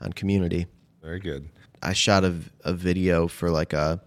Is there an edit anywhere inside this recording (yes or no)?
yes